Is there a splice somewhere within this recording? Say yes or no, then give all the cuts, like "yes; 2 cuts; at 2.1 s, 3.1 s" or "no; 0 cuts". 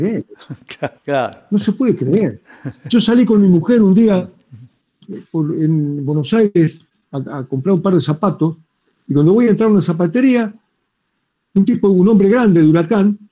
yes; 1 cut; at 1.0 s